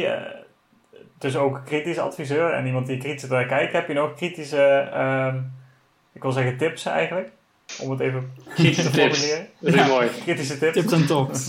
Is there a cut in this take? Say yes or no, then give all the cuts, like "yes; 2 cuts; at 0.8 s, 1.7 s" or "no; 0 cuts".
no; 0 cuts